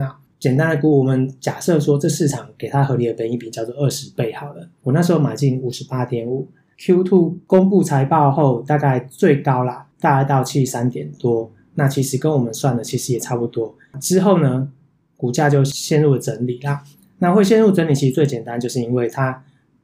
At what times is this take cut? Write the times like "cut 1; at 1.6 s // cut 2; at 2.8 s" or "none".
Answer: none